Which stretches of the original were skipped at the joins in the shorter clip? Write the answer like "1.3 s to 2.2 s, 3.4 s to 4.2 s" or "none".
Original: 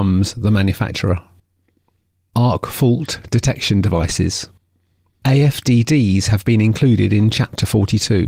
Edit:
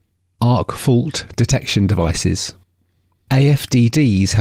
none